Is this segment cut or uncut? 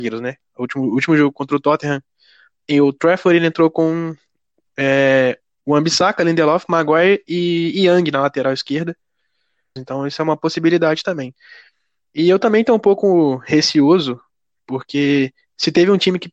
cut